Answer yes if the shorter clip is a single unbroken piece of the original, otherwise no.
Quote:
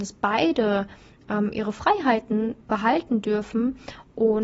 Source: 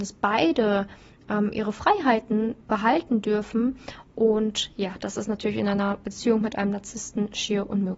yes